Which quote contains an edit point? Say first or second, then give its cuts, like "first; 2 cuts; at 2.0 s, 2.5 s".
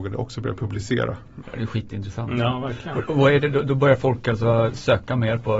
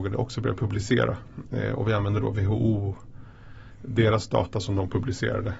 first; 1 cut; at 1.4 s